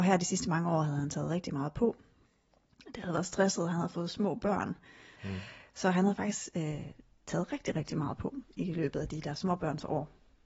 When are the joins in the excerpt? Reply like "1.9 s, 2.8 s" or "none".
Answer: 5.2 s